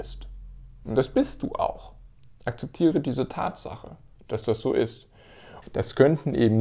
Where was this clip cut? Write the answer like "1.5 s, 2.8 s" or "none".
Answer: 5.6 s